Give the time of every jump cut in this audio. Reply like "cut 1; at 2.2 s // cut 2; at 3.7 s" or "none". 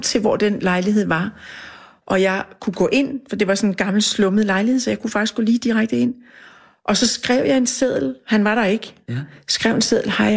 none